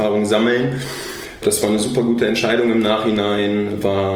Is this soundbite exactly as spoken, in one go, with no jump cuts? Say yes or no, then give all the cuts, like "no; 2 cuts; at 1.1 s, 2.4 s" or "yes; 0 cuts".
no; 1 cut; at 1.4 s